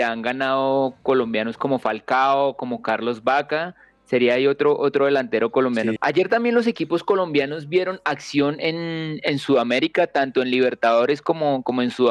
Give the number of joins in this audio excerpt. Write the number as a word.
one